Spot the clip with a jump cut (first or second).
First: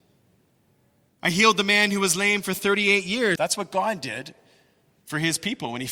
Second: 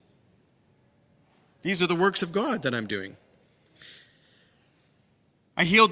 first